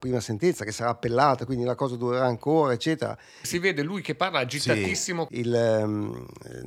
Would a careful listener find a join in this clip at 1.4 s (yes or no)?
no